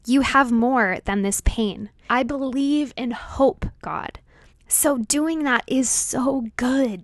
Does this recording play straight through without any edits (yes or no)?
no